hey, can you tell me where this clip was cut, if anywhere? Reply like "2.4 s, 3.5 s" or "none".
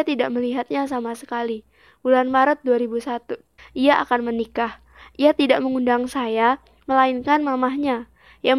3.6 s